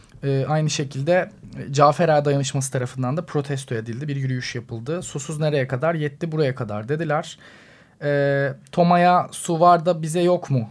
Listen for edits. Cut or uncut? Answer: uncut